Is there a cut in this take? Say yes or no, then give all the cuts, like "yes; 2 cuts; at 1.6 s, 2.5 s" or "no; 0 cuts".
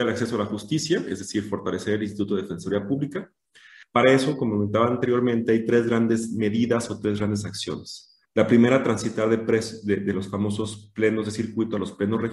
yes; 2 cuts; at 3.8 s, 8.3 s